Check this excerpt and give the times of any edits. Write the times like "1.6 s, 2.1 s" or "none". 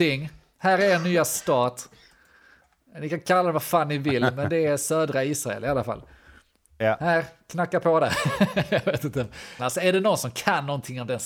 9.6 s